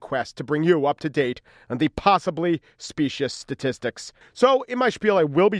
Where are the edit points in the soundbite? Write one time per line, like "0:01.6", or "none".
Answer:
0:04.2